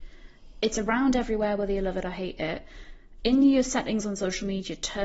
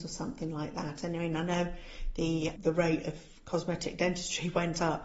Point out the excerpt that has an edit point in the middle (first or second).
second